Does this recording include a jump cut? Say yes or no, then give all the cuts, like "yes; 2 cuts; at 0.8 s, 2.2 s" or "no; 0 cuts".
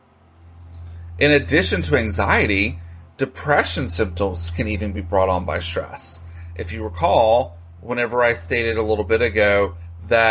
no; 0 cuts